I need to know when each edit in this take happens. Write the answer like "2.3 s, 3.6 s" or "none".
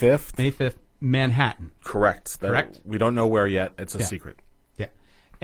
none